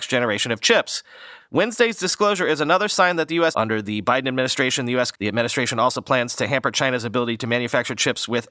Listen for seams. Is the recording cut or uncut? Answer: cut